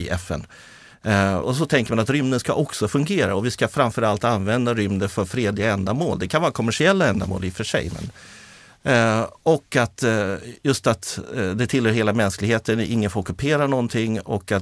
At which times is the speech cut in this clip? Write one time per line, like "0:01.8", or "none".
0:01.4